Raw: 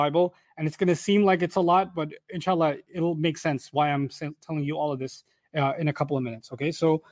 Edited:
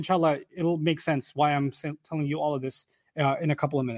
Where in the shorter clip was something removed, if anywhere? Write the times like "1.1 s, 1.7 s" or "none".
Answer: none